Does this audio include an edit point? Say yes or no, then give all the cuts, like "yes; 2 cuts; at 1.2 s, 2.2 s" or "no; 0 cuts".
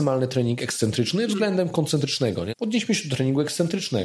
yes; 1 cut; at 2.5 s